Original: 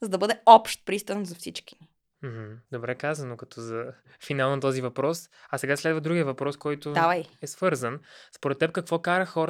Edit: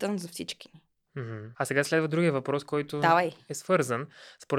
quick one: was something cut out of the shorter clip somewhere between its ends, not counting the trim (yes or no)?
yes